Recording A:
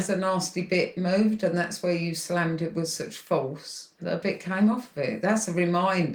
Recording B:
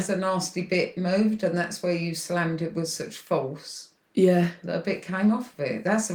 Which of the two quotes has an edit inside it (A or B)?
A